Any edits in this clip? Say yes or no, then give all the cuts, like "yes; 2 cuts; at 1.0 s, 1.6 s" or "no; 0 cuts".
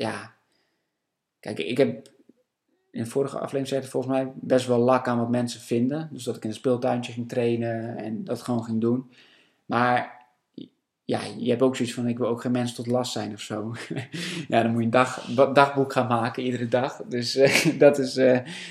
no; 0 cuts